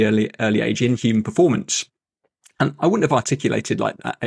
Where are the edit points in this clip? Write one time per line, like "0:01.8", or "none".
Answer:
none